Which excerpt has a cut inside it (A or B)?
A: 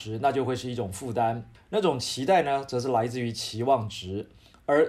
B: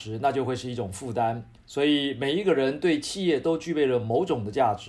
A